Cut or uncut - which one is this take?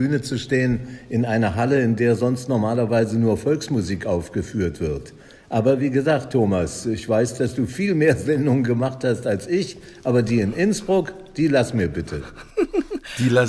uncut